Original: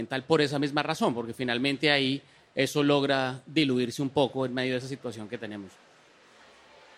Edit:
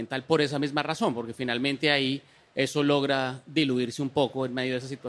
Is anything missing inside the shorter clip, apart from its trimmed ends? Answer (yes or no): no